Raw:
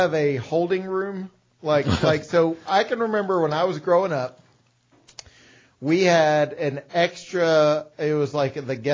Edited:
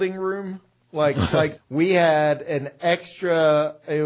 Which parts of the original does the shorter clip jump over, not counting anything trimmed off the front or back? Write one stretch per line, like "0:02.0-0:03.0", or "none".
0:02.3-0:05.7